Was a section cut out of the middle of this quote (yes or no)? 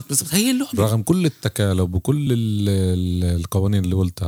no